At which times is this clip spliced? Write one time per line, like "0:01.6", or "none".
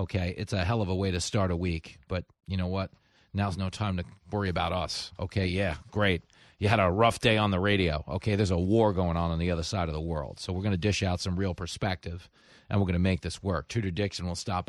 none